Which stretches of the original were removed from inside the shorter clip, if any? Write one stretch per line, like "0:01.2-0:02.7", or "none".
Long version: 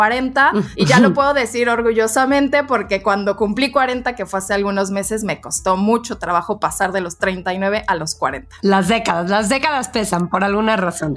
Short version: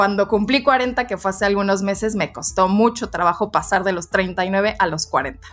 none

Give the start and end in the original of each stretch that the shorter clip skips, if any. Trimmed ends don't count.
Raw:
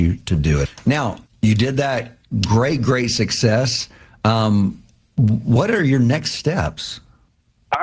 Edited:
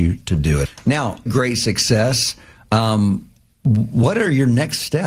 0:01.3-0:02.8

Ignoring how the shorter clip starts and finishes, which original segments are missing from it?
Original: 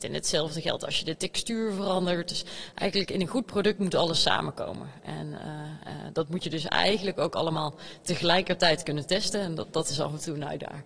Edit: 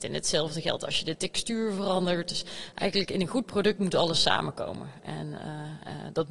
none

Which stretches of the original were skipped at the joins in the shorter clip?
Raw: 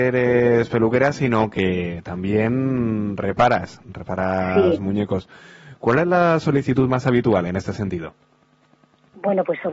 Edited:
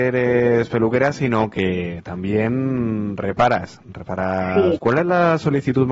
0:04.8-0:05.8

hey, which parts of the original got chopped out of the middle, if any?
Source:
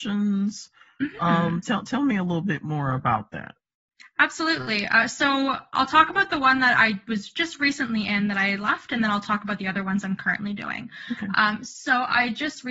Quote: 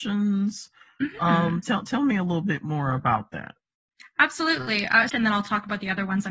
0:05.1-0:08.9

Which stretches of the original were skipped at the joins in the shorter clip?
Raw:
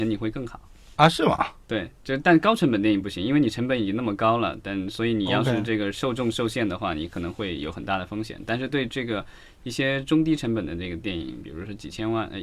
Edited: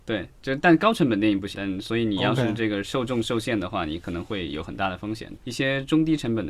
0:03.2-0:04.6
0:08.4-0:09.6

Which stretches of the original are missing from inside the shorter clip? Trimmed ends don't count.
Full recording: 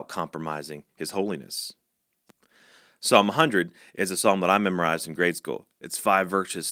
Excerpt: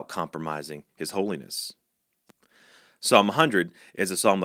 none

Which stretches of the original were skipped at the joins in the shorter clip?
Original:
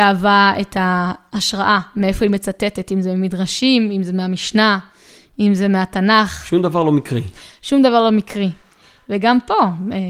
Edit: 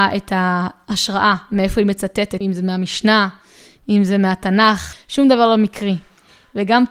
0:02.8-0:03.9
0:06.4-0:07.5

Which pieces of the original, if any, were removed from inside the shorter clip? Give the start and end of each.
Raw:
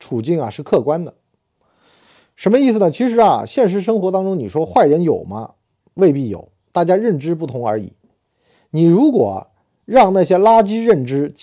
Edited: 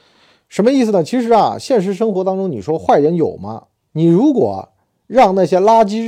0:05.8-0:08.7

